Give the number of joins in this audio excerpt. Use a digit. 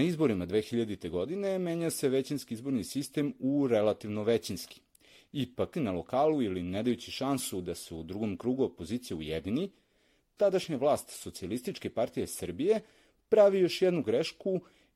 1